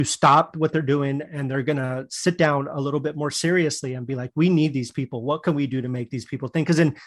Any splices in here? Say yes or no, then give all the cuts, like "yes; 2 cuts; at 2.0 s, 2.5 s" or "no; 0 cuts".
no; 0 cuts